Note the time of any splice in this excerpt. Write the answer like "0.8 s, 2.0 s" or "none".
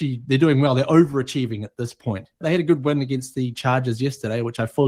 2.4 s